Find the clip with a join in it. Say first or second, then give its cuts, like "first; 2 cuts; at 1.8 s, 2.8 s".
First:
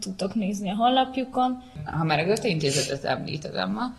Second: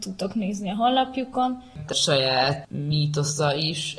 second; 1 cut; at 1.9 s